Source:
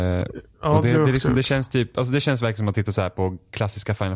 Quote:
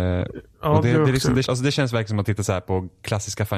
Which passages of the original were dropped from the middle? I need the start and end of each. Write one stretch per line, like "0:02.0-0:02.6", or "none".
0:01.4-0:01.9